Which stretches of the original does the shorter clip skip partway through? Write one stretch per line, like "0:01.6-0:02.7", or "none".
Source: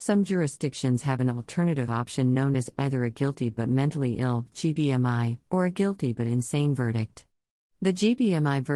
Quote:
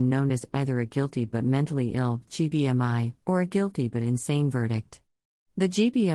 none

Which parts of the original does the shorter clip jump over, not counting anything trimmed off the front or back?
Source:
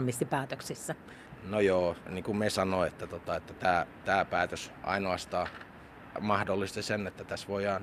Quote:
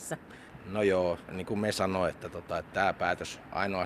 0:03.5-0:04.0

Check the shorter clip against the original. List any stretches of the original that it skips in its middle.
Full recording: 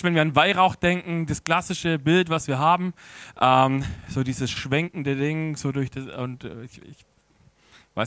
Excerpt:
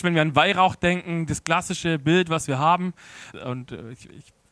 0:03.3-0:06.1

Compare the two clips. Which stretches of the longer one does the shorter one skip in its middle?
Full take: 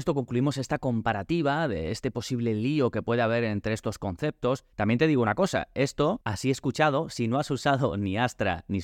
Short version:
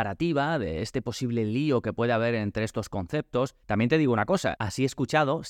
0:05.7-0:06.2

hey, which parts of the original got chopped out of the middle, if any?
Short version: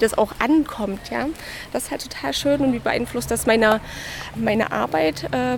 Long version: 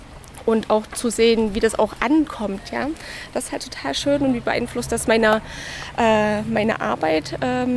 0:06.0-0:06.4

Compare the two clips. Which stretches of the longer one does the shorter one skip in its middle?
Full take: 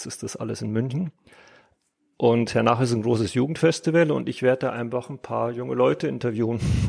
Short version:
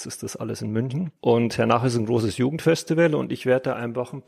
0:01.2-0:02.1

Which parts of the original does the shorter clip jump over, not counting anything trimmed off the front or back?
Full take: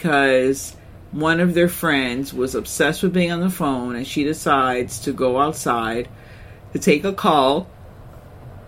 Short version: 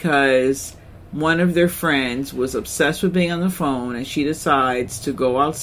none

